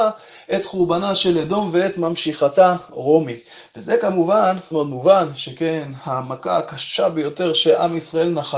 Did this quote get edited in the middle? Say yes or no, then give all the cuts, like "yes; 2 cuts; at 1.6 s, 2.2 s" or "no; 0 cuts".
yes; 1 cut; at 4.7 s